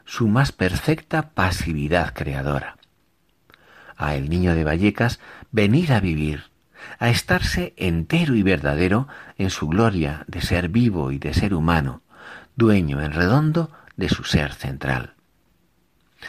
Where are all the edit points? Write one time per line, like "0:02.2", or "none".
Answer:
0:05.5